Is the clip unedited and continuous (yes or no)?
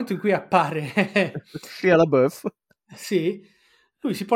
yes